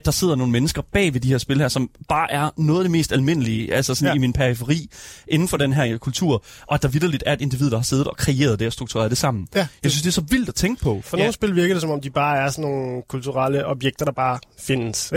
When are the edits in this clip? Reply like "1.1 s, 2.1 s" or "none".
none